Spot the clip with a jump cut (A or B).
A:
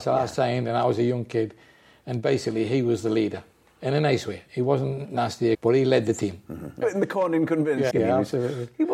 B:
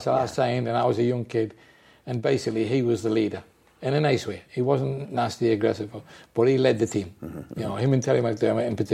A